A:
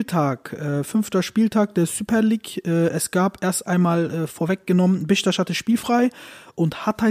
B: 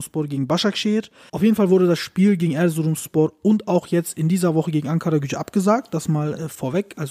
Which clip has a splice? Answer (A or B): B